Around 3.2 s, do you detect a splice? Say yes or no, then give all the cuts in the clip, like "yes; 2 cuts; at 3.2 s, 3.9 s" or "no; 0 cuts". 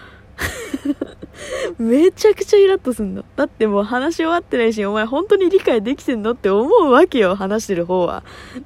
no; 0 cuts